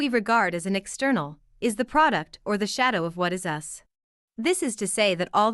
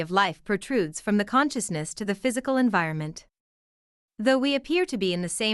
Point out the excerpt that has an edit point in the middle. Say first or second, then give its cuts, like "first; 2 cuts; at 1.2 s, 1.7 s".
first; 1 cut; at 4.3 s